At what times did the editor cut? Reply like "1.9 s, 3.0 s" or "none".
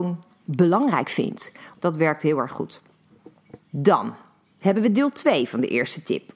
1.7 s, 3.6 s